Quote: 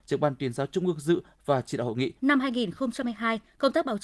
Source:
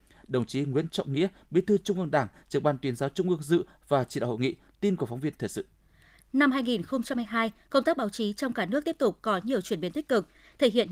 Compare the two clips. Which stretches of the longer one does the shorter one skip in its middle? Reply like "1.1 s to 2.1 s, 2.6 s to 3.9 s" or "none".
4.6 s to 6.3 s